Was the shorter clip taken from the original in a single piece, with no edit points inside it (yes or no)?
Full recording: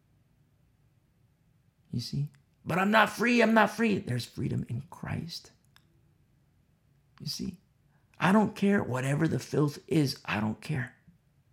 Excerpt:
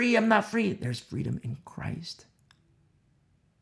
yes